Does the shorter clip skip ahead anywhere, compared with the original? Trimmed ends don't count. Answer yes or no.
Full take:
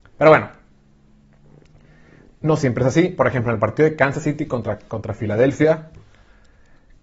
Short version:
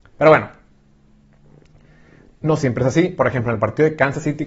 no